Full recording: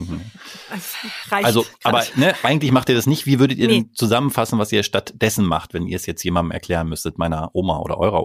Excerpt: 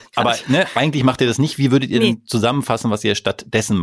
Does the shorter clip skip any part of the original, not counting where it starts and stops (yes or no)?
no